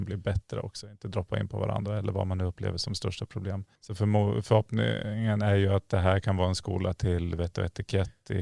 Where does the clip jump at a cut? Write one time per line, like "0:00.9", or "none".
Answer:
0:03.8